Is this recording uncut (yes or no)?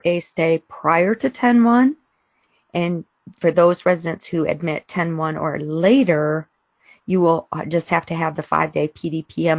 yes